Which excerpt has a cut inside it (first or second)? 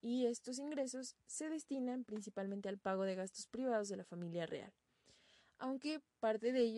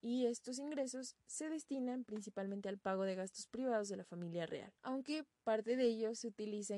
second